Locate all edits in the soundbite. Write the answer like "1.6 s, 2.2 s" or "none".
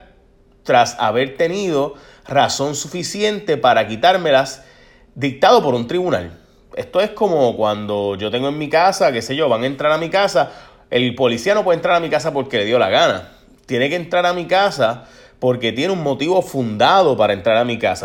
none